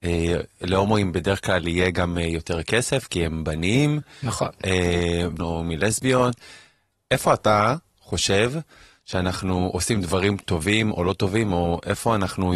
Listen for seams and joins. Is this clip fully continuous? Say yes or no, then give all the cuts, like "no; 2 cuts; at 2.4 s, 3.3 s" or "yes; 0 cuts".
no; 1 cut; at 5.4 s